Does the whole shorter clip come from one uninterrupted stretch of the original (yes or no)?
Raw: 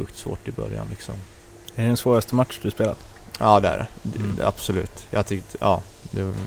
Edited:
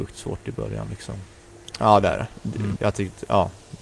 no